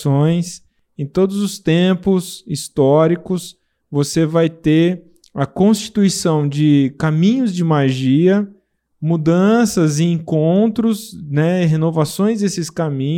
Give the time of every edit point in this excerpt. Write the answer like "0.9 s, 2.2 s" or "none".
none